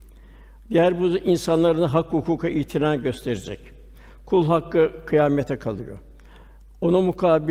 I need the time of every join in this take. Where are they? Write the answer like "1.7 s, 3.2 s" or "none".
none